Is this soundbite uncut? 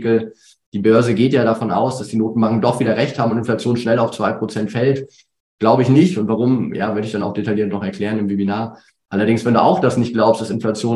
yes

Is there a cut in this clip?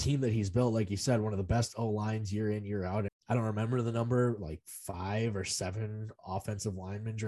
yes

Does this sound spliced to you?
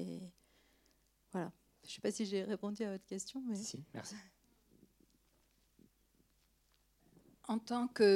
no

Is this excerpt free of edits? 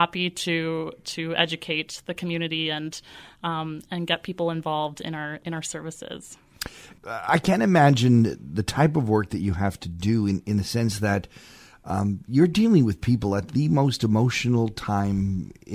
no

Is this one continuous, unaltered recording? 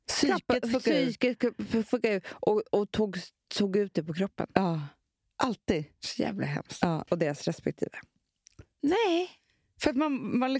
no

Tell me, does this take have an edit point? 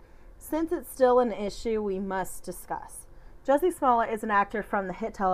no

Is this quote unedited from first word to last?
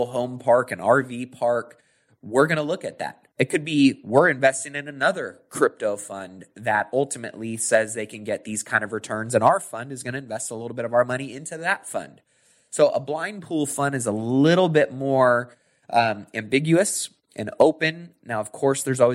yes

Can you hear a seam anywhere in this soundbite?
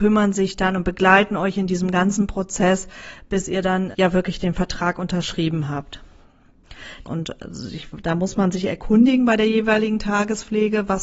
yes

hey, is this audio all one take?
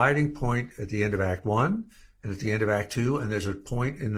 yes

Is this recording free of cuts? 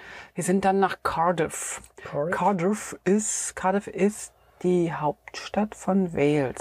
yes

